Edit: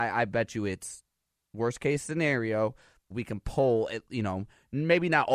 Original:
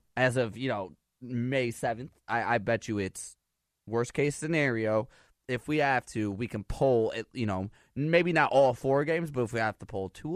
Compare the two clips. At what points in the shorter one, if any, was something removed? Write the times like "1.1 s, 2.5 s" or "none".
3.1 s